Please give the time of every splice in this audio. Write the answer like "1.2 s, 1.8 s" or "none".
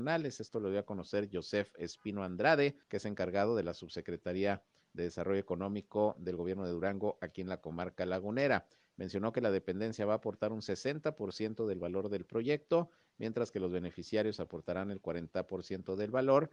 2.8 s